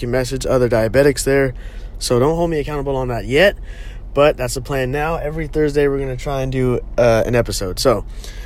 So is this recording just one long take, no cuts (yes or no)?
no